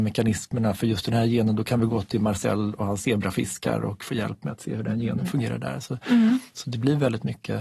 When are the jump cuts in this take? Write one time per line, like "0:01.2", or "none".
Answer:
none